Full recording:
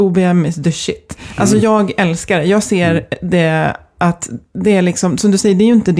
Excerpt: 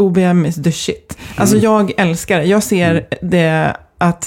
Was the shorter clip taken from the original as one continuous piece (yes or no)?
yes